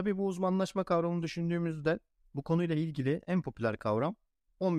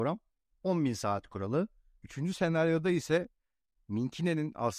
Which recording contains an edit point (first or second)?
second